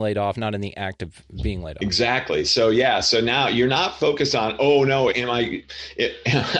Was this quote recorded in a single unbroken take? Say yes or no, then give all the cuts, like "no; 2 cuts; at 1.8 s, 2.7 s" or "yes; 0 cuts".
no; 1 cut; at 5.1 s